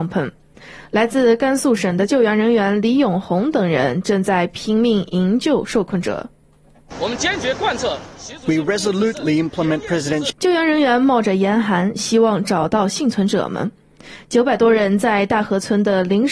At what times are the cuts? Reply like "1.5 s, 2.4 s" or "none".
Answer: 10.3 s